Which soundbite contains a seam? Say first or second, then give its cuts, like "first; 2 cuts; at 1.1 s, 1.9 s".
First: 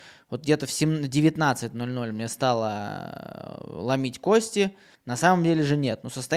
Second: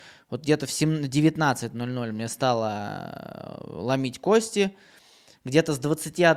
first; 1 cut; at 4.9 s